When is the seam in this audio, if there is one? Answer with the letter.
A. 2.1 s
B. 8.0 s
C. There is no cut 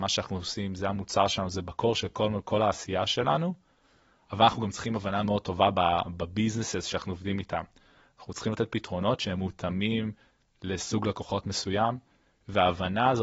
C